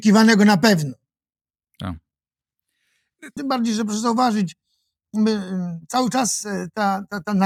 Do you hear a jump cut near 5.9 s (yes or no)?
no